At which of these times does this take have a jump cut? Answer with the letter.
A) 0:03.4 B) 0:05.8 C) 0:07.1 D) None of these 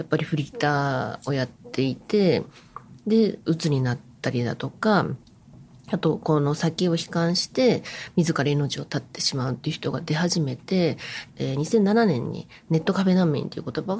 A